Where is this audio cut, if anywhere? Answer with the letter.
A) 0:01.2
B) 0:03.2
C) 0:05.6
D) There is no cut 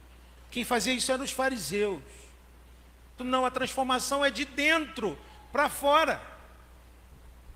B